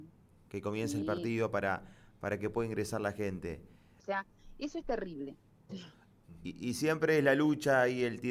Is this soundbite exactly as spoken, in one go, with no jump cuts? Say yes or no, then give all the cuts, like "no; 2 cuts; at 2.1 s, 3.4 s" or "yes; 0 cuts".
no; 2 cuts; at 4.0 s, 5.7 s